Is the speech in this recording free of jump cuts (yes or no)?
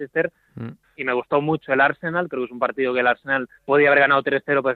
no